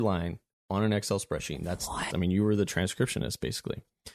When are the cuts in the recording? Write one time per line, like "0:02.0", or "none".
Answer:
0:02.1